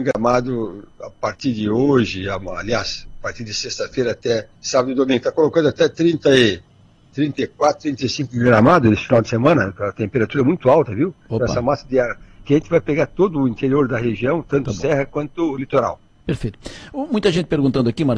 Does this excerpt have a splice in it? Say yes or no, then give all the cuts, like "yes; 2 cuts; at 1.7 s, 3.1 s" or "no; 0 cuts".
yes; 1 cut; at 4.5 s